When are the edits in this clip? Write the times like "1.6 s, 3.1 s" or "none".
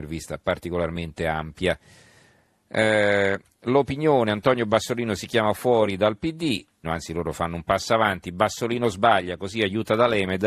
6.8 s